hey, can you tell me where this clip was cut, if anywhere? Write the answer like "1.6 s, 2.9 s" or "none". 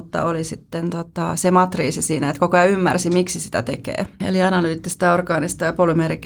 4.2 s